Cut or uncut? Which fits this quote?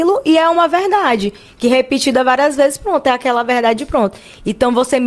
uncut